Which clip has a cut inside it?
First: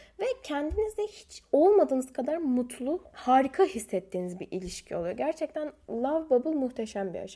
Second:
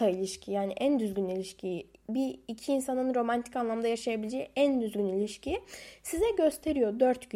first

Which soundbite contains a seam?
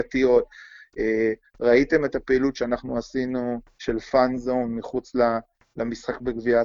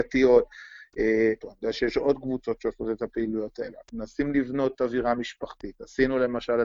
second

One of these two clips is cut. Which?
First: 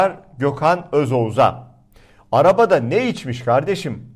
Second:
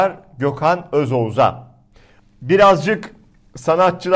second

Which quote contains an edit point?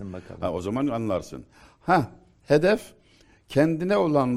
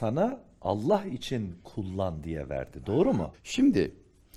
second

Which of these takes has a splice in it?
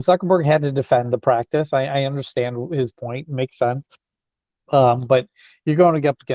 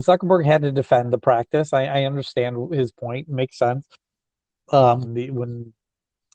second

